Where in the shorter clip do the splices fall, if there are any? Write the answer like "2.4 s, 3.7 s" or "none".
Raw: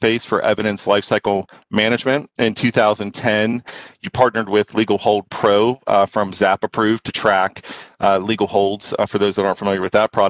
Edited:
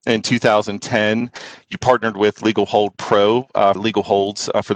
3.8 s